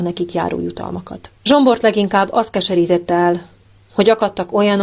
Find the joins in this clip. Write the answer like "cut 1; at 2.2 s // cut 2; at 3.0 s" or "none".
cut 1; at 1.4 s